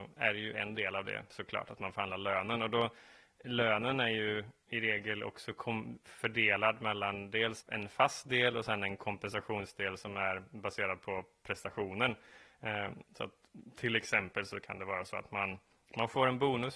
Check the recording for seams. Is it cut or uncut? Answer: cut